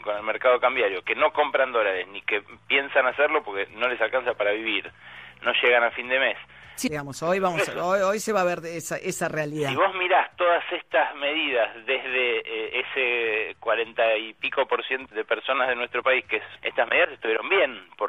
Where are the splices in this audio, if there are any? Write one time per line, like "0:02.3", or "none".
0:06.9
0:15.1
0:16.6